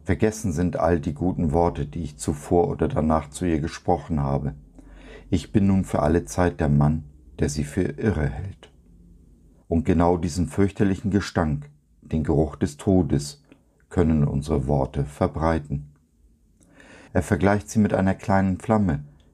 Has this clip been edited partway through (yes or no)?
yes